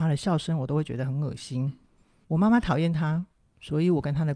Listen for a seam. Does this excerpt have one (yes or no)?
yes